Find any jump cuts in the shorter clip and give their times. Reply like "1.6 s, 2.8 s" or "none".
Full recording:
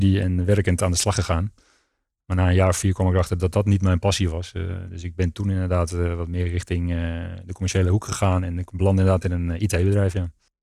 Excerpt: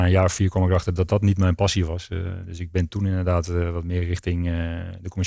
none